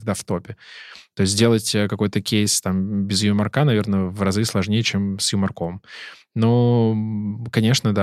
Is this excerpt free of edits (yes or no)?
yes